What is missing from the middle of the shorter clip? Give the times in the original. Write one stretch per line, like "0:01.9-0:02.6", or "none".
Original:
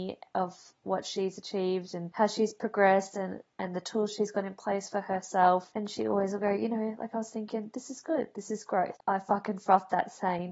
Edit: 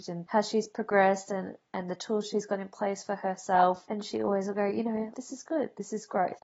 0:07.0-0:07.7